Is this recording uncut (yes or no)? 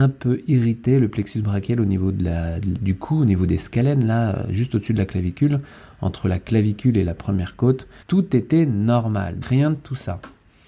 no